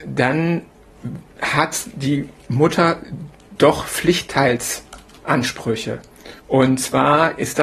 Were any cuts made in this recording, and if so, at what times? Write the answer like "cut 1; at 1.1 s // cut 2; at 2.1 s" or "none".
cut 1; at 6.4 s